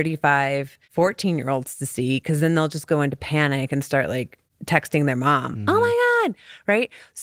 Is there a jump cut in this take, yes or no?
no